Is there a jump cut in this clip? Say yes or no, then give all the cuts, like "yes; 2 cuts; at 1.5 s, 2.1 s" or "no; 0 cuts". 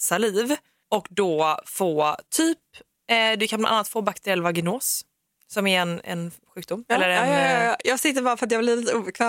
no; 0 cuts